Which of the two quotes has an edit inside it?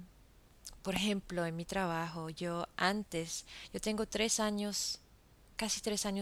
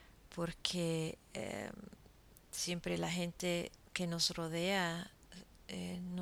second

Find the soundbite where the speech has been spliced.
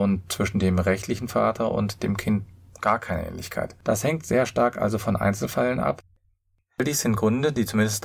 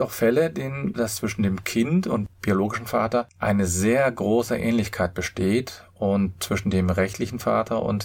second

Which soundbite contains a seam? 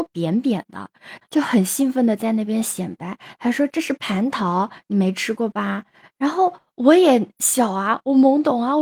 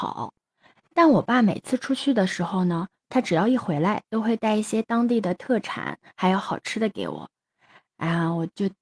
first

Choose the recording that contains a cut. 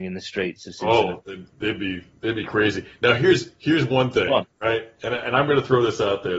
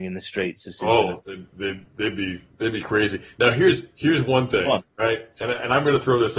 first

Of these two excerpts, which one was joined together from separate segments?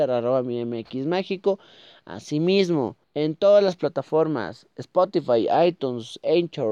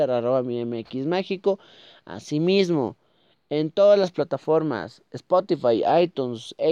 first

